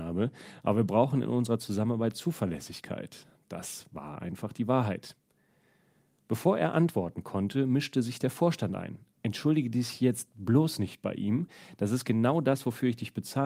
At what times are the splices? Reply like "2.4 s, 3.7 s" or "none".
none